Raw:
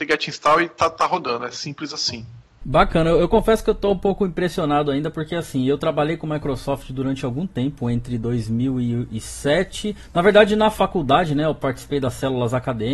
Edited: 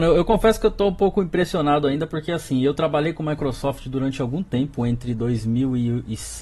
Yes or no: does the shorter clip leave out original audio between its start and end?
no